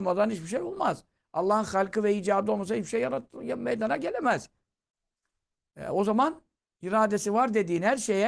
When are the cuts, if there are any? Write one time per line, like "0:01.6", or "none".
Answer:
none